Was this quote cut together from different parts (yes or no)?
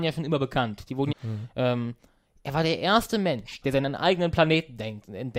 yes